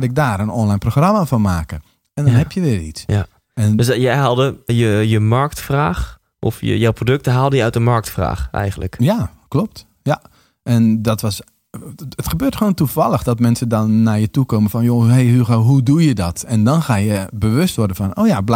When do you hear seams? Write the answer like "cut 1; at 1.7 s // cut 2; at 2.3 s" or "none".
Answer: cut 1; at 4.7 s